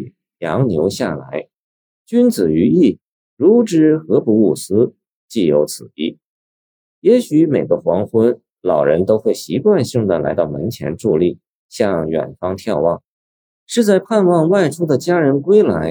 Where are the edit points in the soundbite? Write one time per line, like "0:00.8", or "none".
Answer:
none